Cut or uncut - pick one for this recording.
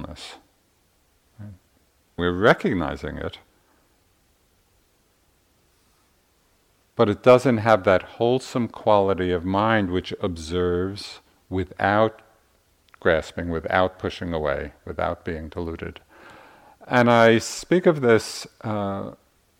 cut